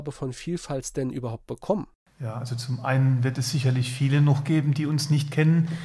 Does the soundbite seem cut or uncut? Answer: uncut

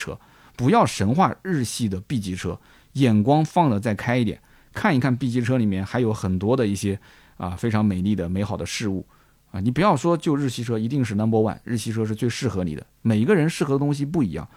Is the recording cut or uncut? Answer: uncut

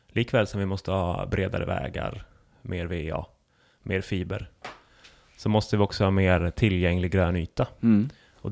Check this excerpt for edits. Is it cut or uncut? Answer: uncut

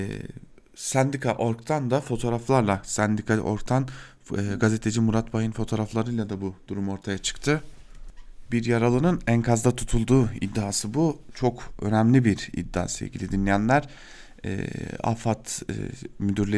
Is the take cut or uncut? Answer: uncut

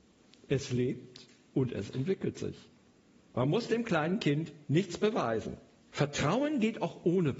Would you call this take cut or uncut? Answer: cut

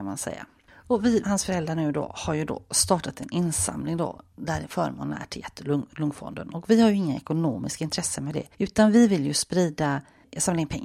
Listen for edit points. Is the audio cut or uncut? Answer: cut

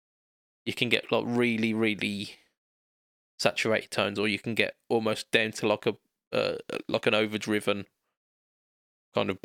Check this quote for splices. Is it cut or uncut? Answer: uncut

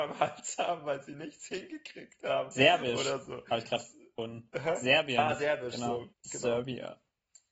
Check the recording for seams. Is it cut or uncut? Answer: cut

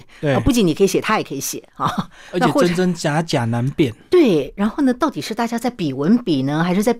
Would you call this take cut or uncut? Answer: uncut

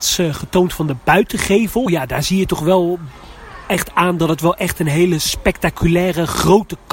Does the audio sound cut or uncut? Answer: uncut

